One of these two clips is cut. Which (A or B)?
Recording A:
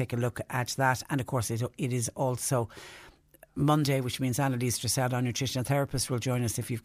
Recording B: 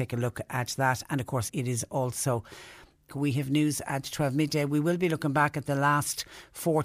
B